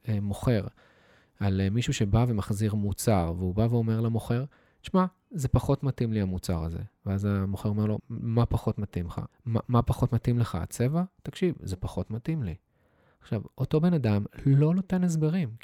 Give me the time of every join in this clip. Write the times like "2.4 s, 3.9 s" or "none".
8.0 s, 9.3 s